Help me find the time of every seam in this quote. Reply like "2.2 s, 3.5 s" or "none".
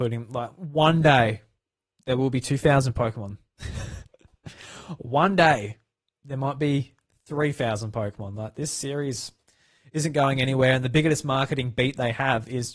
none